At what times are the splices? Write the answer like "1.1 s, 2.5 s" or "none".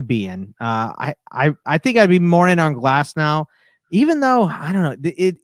none